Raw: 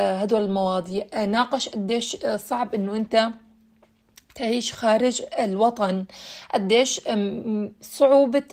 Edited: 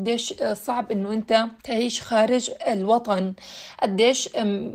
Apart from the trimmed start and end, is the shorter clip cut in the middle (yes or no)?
yes